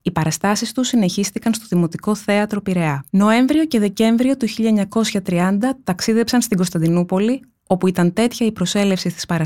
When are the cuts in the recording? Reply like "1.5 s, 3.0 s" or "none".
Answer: 3.1 s